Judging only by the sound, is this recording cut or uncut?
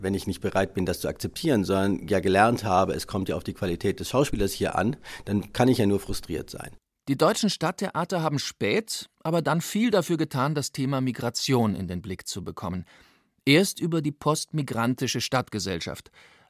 uncut